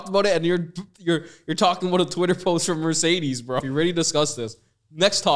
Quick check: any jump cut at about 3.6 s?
yes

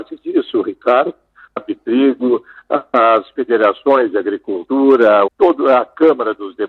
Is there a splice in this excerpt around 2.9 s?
no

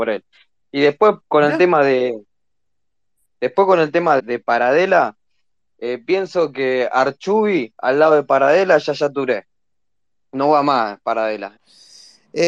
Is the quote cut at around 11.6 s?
yes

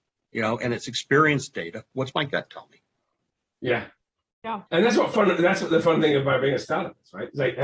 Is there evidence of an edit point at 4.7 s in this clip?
yes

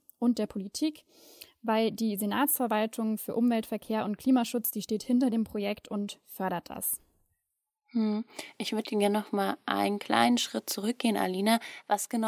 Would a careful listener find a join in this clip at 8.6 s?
no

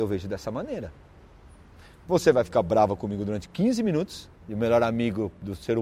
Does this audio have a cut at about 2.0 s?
yes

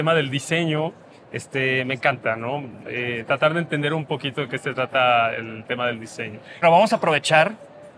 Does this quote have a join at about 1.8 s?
no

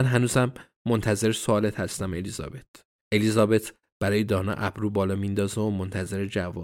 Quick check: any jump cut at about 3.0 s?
yes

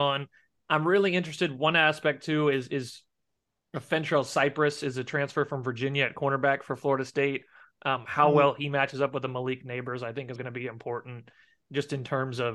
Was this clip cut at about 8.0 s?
no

